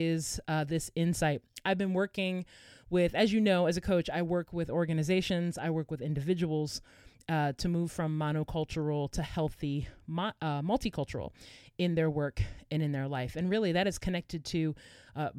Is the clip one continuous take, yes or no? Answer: yes